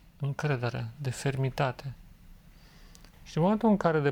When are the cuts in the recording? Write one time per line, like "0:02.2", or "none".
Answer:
0:03.1